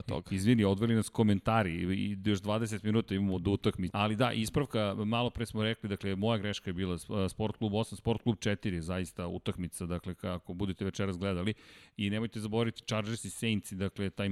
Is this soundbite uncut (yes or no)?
no